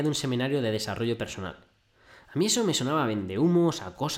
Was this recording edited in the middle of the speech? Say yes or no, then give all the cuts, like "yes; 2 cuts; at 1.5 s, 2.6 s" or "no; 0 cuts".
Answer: no; 0 cuts